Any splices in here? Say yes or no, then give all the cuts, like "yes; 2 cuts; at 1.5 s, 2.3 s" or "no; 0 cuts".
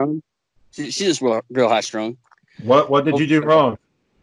no; 0 cuts